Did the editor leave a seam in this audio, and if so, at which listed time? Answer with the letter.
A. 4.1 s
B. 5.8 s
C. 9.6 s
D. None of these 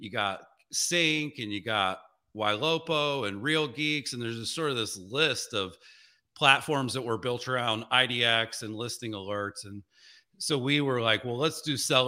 D